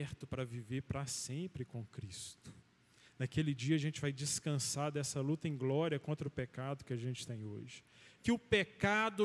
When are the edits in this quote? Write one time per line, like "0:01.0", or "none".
0:08.2